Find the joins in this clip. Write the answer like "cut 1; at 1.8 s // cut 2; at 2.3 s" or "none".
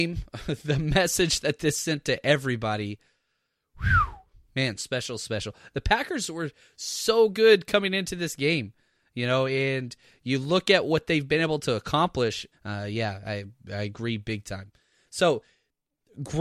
cut 1; at 4.8 s // cut 2; at 12.5 s